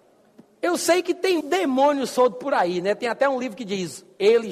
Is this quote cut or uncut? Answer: cut